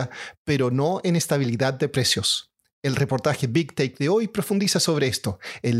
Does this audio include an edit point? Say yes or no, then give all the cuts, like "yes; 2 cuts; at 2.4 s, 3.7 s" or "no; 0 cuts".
no; 0 cuts